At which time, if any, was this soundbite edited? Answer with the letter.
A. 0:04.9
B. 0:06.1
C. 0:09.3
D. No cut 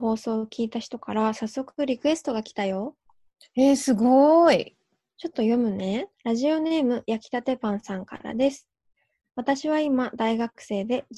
B